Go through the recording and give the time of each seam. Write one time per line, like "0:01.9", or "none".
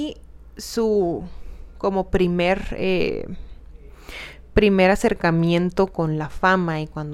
none